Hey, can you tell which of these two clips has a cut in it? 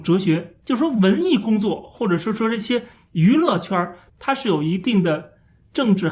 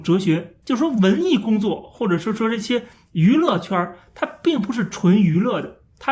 first; 1 cut; at 4.1 s

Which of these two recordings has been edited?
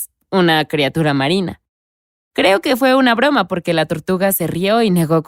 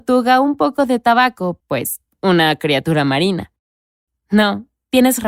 second; 2 cuts; at 1.6 s, 4.1 s

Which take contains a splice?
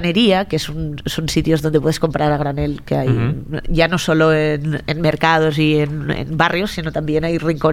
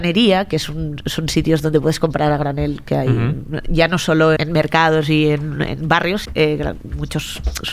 second; 2 cuts; at 4.4 s, 6.2 s

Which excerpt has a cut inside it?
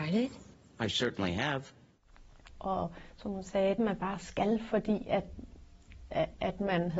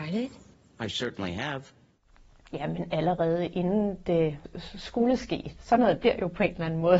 first; 2 cuts; at 2.5 s, 3.8 s

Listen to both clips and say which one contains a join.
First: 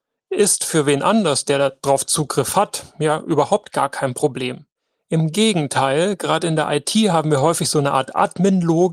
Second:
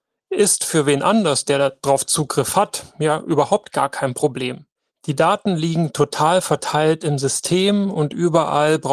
second; 1 cut; at 4.9 s

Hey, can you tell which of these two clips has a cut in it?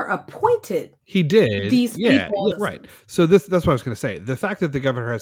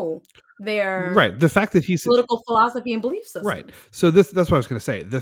first; 1 cut; at 2.5 s

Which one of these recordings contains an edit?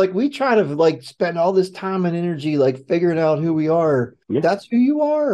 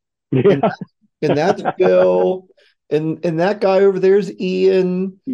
first; 1 cut; at 4.2 s

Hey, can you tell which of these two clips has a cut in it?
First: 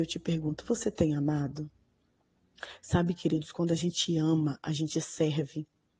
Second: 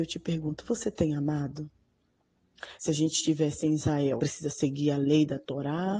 second; 2 cuts; at 2.8 s, 4.2 s

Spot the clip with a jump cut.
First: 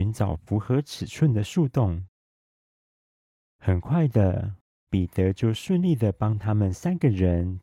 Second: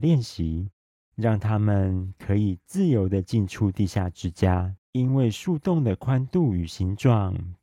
second; 2 cuts; at 1.0 s, 4.8 s

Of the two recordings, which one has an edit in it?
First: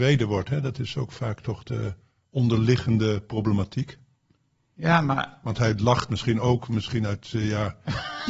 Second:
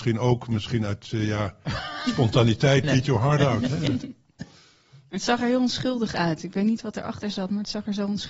second; 1 cut; at 2.8 s

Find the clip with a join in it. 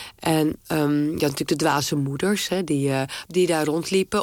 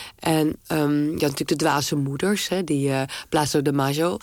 first; 1 cut; at 3.3 s

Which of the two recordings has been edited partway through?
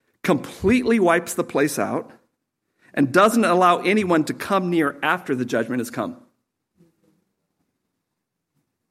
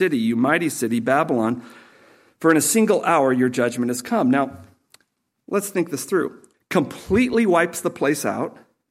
second; 1 cut; at 6.5 s

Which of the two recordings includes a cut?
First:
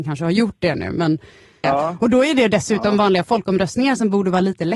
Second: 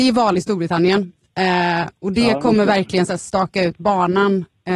first; 1 cut; at 1.6 s

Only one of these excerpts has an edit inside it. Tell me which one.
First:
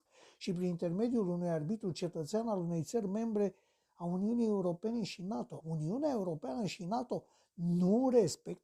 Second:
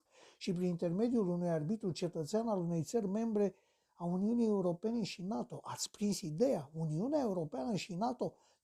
first; 1 cut; at 5.6 s

